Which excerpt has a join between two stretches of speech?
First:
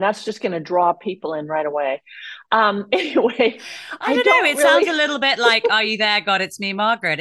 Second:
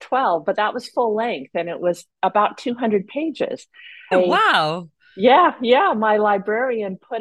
second; 1 cut; at 4.1 s

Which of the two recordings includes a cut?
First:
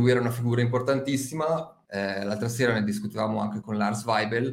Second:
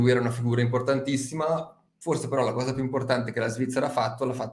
first; 2 cuts; at 1.8 s, 3.6 s

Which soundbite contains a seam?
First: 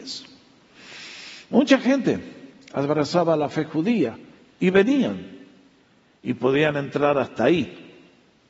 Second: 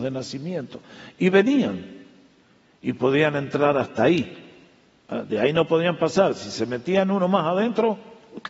first; 1 cut; at 4.5 s

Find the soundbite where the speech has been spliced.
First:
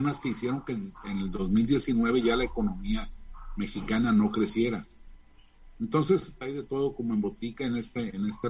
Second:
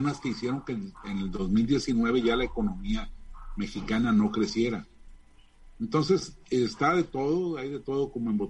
first; 1 cut; at 6.4 s

